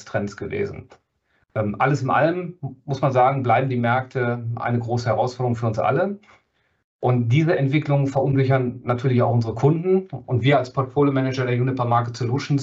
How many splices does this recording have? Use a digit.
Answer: 0